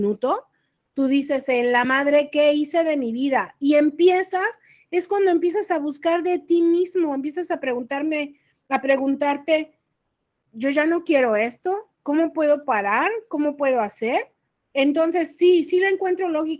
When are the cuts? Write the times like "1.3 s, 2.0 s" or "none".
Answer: none